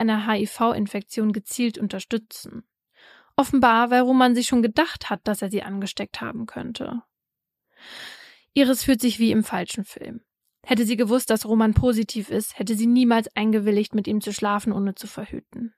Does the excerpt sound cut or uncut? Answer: uncut